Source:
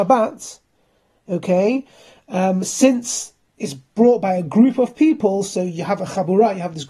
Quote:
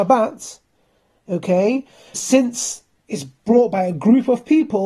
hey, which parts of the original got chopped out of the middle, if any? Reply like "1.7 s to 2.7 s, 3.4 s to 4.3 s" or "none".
2.1 s to 2.6 s

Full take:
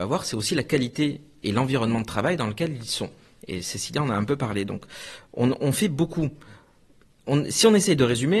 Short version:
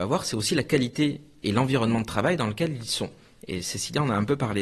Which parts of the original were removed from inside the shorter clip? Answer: none

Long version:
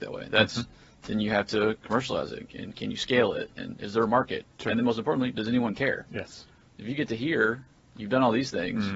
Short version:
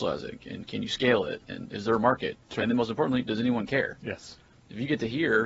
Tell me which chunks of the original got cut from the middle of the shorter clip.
none

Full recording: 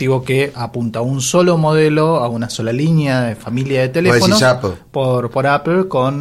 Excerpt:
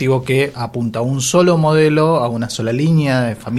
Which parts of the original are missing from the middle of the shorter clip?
none

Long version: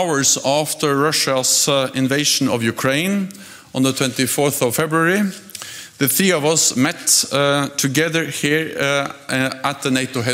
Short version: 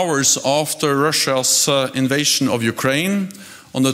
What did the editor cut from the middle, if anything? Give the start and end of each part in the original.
none

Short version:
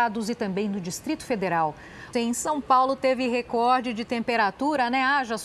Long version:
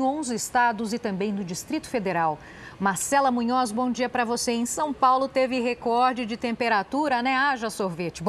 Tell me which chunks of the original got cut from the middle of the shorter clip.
2.8 s to 4.5 s

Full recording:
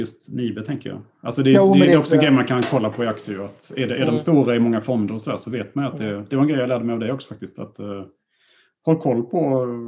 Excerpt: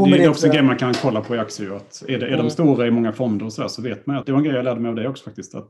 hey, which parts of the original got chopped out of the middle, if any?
5.9 s to 6.3 s

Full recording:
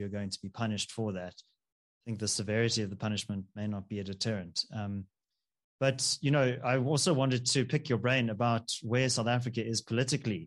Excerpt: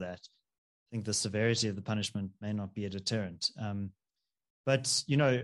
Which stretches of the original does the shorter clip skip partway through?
none

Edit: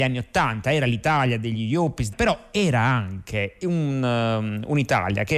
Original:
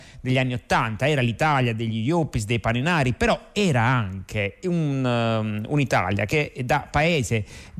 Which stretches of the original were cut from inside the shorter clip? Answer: 2.5 s to 3.1 s

